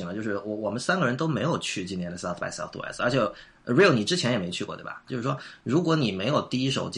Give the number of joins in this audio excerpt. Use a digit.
1